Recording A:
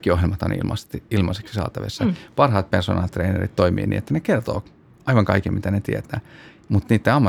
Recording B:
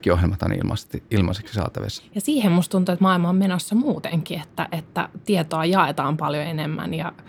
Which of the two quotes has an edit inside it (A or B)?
B